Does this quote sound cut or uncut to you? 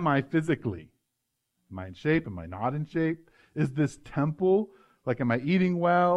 uncut